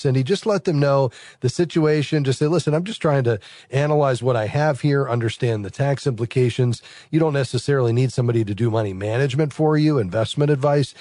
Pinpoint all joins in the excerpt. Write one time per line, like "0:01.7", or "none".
none